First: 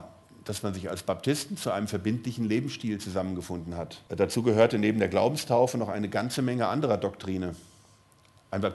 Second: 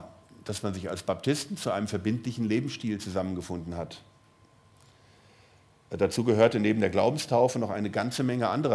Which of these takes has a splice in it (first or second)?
first